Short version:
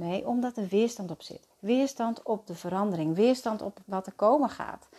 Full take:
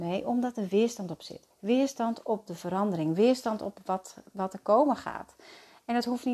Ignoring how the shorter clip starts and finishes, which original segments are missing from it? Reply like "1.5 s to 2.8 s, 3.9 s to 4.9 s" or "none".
3.8 s to 4.3 s